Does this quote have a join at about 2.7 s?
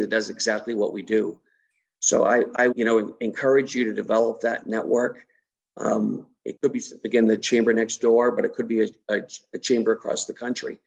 yes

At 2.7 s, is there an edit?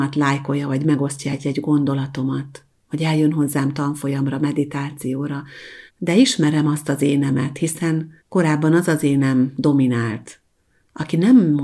no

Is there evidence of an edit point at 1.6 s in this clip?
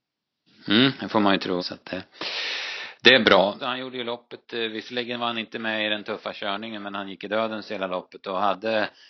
yes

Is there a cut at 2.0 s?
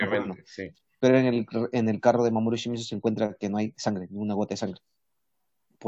no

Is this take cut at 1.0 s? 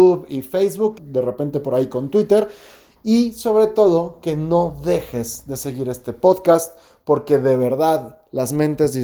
yes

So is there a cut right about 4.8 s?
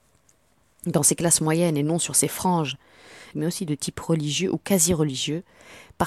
no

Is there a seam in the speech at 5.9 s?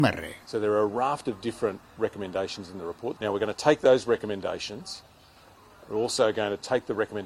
no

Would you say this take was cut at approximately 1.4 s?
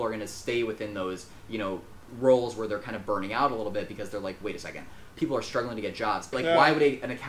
no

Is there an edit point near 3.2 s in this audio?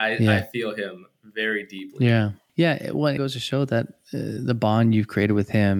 yes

